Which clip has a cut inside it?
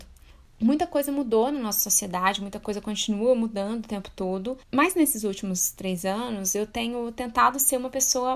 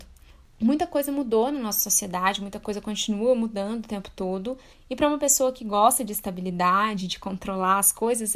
first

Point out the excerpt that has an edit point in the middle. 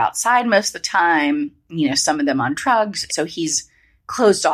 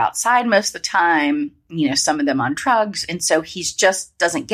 first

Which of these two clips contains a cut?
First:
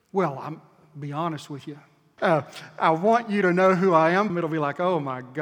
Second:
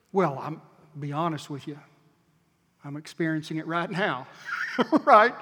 first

